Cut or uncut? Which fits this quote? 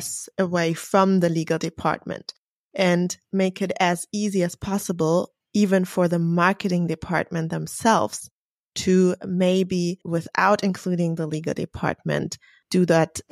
cut